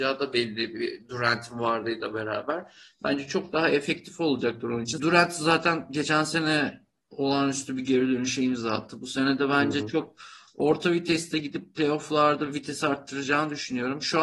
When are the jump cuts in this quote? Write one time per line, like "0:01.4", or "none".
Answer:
0:05.0